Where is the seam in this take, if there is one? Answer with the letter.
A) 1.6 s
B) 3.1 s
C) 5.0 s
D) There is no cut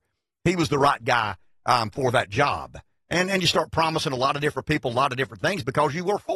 D